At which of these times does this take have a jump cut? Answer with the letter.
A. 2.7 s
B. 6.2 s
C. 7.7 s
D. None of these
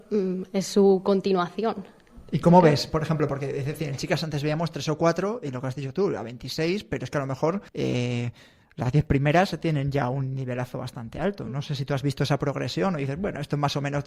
C